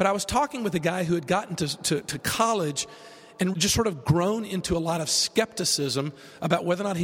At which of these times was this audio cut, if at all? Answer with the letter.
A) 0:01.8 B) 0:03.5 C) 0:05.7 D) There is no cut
B